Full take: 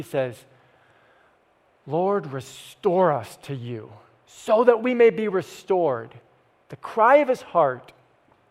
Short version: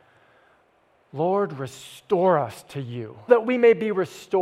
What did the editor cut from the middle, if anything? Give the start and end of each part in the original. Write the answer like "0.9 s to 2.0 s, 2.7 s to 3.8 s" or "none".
4.0 s to 4.6 s